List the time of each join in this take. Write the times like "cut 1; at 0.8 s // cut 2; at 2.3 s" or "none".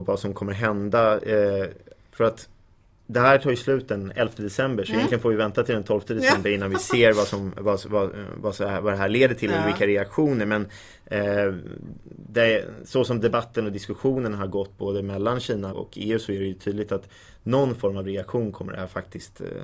cut 1; at 15.7 s